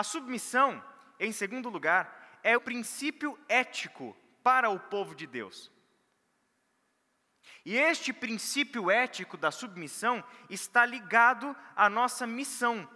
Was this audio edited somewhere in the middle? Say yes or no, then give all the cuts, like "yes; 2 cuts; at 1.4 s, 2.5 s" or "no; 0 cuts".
yes; 1 cut; at 2.6 s